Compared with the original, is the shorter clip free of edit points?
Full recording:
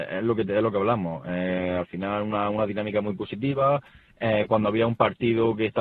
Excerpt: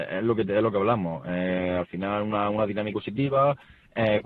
no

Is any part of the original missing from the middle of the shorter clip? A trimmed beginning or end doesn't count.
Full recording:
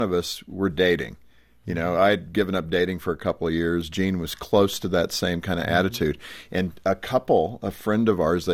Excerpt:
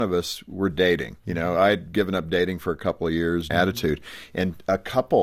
yes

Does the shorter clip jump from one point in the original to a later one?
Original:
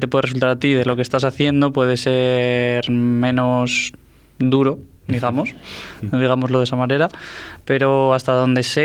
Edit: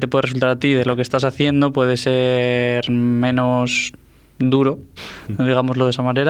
yes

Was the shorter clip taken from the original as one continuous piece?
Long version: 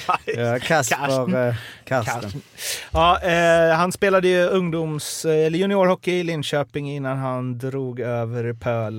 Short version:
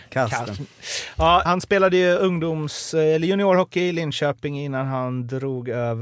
no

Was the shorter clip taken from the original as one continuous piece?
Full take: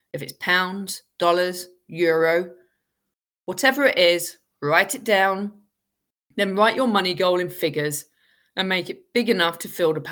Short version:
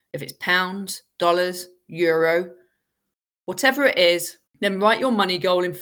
no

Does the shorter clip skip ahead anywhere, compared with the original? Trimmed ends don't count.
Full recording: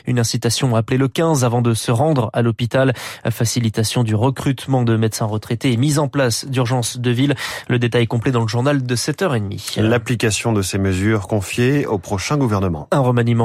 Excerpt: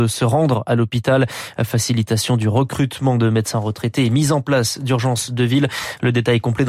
no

